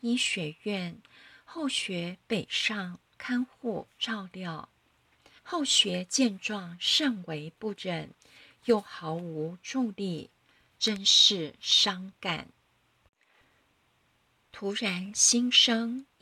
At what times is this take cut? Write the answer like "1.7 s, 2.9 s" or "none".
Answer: 5.4 s

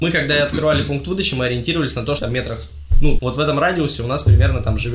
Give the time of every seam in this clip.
2.2 s, 3.2 s

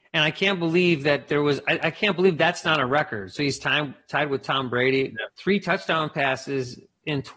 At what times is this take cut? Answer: none

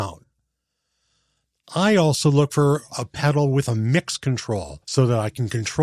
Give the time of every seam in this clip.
4.8 s

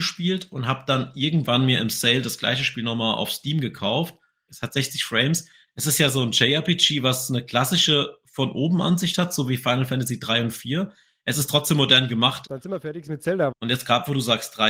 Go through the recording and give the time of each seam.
4.5 s, 12.5 s, 13.5 s

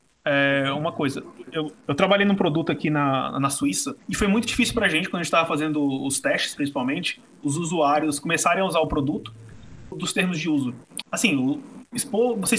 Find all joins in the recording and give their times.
9.9 s, 11.0 s

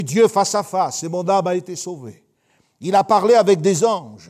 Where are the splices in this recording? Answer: none

